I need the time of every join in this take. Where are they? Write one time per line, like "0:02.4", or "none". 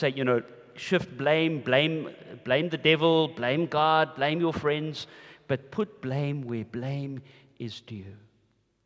none